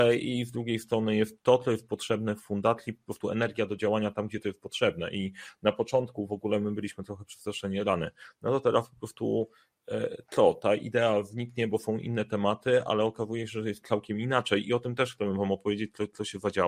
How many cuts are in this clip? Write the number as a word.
one